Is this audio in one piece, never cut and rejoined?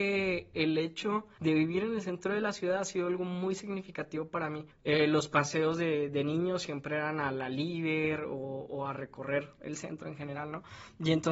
yes; 0 cuts

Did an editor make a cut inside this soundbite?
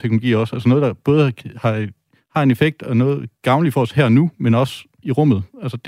no; 0 cuts

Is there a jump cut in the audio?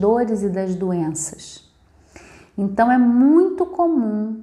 no; 0 cuts

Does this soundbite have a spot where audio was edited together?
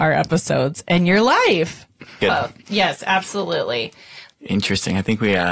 yes; 2 cuts; at 2.2 s, 4.3 s

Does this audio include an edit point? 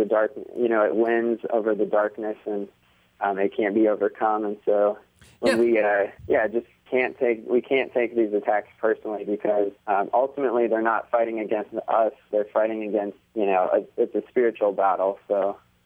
yes; 3 cuts; at 6.2 s, 9.8 s, 13.3 s

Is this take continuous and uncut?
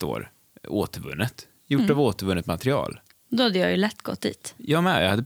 yes; 0 cuts

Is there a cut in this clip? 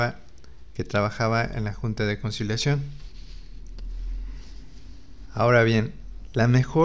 no; 0 cuts

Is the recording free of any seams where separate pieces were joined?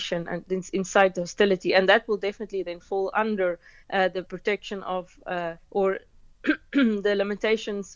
yes; 0 cuts

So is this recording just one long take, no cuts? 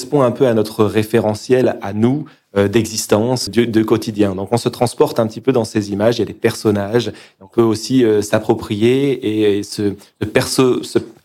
no; 1 cut; at 3.5 s

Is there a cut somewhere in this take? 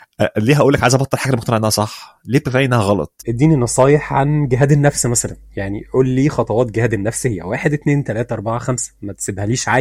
yes; 1 cut; at 3.2 s

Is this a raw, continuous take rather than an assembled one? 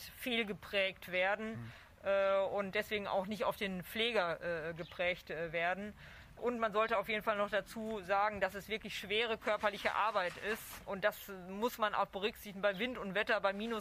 yes; 0 cuts

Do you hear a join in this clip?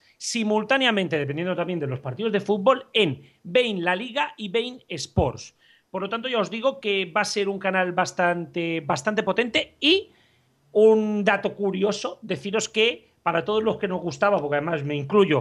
no; 0 cuts

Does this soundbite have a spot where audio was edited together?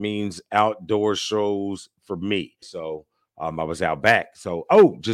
yes; 1 cut; at 2.6 s

